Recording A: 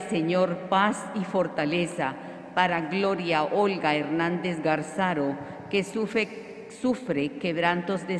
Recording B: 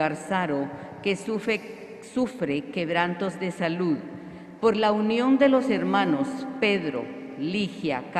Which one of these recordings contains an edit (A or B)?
B